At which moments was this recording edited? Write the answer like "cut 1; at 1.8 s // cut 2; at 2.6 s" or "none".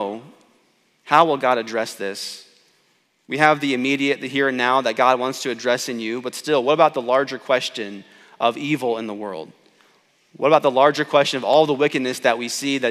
none